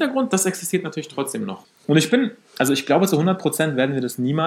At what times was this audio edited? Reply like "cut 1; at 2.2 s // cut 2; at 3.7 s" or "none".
cut 1; at 1.6 s